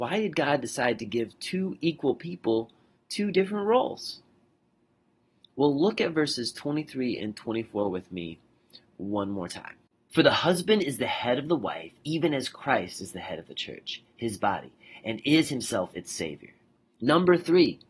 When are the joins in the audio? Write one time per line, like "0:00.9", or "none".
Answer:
0:16.9